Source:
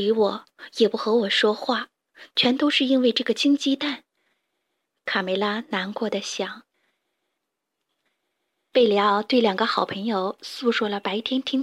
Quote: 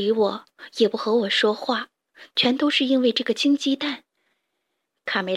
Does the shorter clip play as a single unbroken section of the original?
yes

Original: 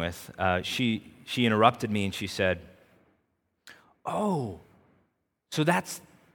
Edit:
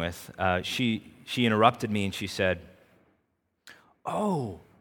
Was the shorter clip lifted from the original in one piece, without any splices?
yes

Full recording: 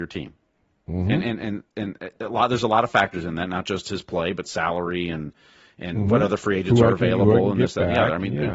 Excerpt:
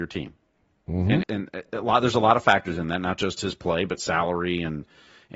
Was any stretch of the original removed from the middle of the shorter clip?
yes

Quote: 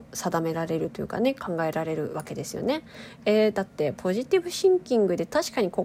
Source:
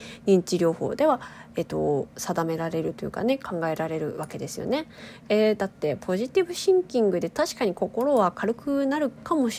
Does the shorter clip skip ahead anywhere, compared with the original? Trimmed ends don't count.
no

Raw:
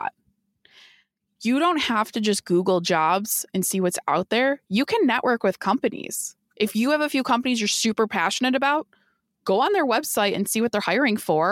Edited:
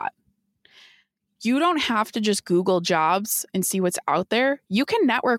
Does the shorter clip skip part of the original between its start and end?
no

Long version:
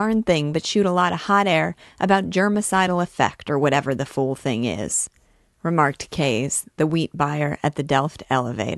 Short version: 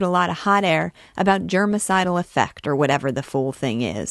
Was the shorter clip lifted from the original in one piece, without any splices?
yes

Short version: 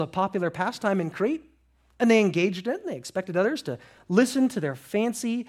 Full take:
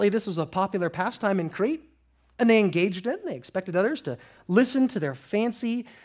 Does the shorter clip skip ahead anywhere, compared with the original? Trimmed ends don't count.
no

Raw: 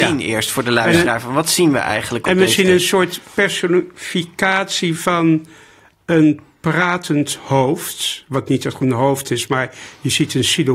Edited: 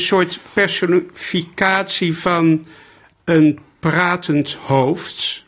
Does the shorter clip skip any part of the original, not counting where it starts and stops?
no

